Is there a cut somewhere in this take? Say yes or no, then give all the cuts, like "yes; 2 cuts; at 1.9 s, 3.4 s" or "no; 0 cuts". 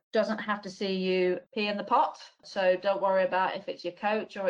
no; 0 cuts